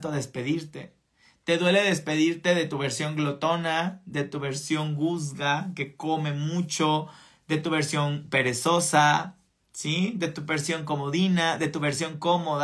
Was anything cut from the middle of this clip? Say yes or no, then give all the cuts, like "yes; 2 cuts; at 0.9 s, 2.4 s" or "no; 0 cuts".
no; 0 cuts